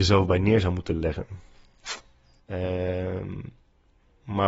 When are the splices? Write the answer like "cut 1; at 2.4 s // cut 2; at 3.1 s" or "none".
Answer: cut 1; at 2.4 s